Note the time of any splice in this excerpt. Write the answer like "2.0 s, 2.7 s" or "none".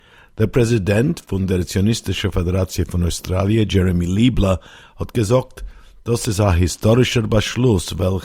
none